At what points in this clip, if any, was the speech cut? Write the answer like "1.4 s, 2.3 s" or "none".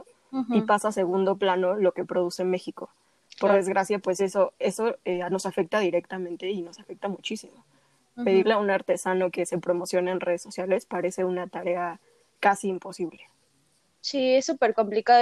none